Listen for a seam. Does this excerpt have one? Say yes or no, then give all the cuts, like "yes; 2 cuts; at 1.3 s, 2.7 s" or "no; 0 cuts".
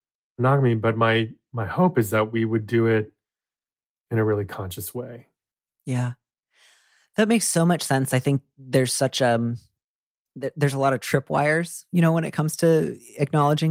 no; 0 cuts